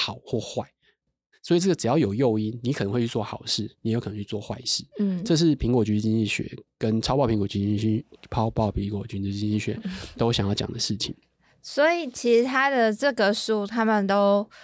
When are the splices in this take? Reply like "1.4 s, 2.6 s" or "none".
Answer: none